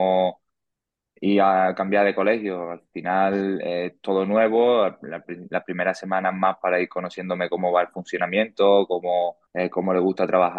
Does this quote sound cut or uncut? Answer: cut